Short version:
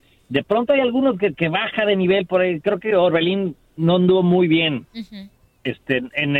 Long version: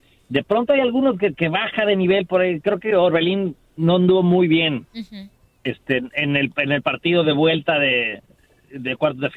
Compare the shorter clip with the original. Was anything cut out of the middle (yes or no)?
no